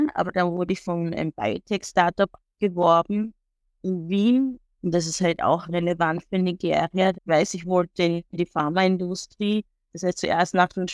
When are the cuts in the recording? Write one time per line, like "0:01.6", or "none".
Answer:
0:04.6
0:07.1